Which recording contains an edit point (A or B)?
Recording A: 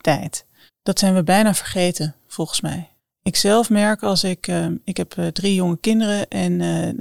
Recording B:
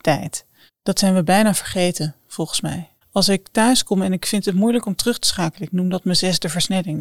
B